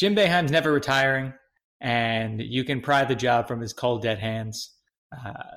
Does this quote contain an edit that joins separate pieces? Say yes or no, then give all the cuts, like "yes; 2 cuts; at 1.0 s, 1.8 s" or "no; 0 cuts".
no; 0 cuts